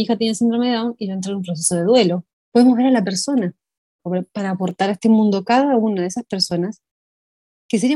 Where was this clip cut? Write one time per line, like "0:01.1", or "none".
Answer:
0:02.3
0:04.0